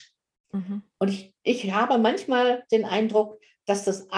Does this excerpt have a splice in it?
no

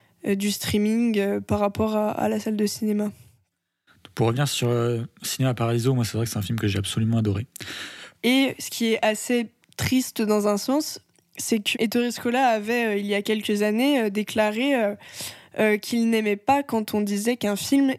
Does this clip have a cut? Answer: yes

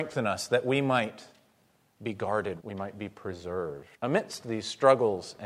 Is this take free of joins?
no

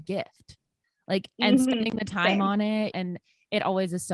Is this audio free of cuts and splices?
no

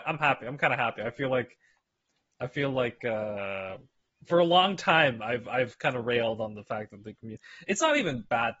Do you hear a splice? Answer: yes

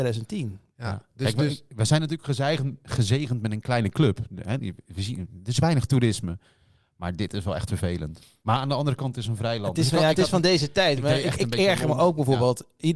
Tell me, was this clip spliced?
no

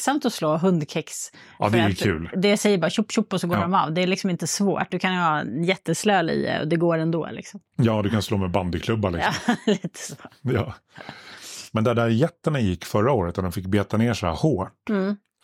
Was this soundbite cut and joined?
no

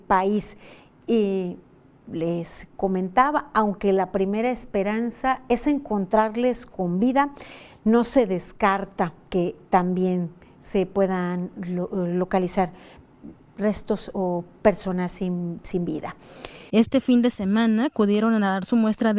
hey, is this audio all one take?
no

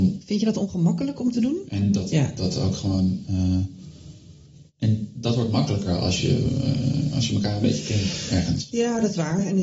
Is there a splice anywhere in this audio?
yes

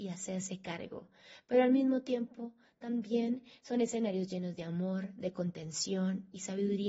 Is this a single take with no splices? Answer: yes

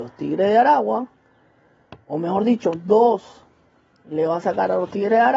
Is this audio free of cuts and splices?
yes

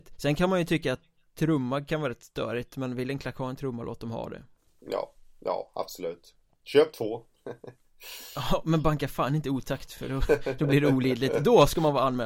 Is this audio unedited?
yes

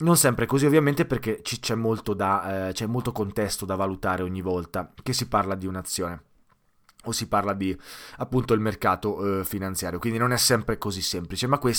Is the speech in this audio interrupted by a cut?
no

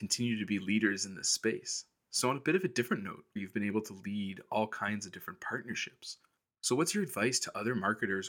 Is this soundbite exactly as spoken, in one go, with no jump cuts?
no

